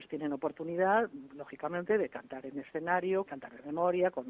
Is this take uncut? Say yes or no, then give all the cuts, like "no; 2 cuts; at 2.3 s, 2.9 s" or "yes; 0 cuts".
no; 1 cut; at 3.3 s